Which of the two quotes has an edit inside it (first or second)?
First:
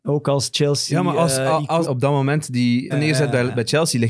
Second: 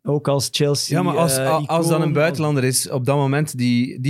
first